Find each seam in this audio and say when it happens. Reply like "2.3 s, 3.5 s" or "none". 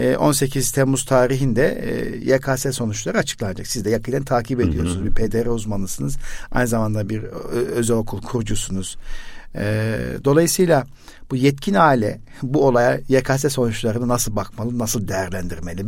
none